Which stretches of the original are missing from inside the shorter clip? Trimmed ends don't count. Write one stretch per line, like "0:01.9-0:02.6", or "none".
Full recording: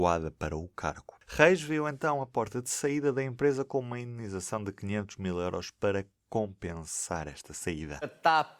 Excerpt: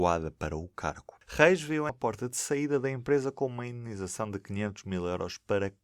0:01.9-0:02.2